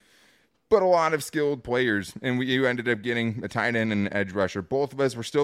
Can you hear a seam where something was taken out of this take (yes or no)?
no